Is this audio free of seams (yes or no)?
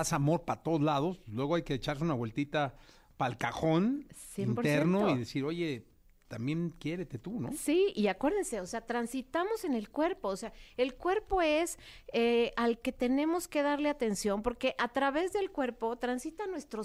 yes